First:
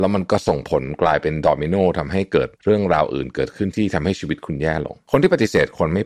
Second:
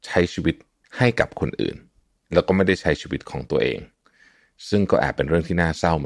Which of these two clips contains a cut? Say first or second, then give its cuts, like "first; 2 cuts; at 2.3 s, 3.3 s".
first; 1 cut; at 2.5 s